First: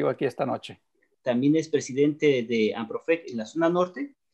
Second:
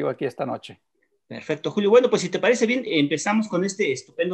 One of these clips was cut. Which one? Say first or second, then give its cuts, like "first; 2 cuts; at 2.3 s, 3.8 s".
first; 1 cut; at 1.1 s